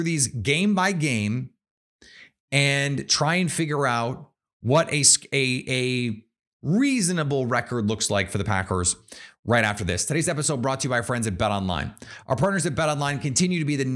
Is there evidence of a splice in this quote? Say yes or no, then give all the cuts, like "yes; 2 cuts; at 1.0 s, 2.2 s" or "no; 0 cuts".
no; 0 cuts